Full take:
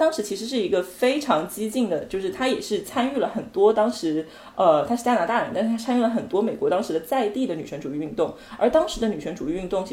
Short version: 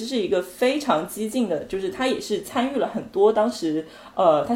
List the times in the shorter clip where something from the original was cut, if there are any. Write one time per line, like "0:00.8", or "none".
none